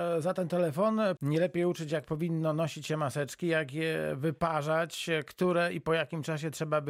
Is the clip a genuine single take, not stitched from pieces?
no; 1 cut; at 1.2 s

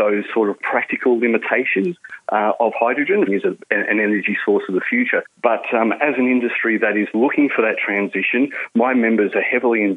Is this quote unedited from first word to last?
no; 2 cuts; at 3.3 s, 5.2 s

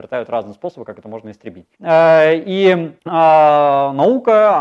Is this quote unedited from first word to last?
no; 2 cuts; at 1.7 s, 3.0 s

